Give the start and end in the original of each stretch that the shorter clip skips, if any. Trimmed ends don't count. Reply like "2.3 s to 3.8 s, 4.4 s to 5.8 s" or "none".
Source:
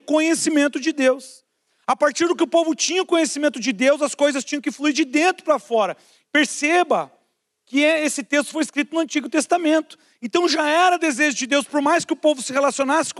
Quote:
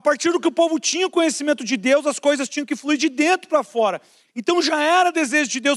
6.2 s to 10.1 s